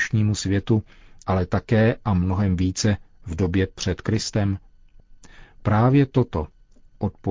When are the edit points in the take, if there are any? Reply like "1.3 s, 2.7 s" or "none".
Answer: 1.2 s